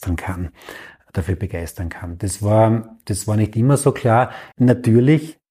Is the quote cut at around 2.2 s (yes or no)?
no